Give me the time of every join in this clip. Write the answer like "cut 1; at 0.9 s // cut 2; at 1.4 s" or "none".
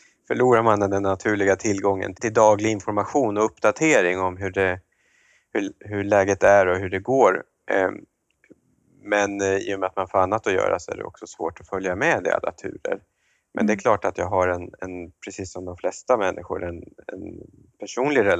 cut 1; at 2.1 s